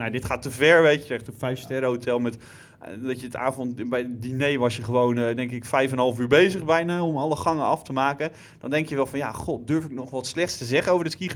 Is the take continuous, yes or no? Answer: yes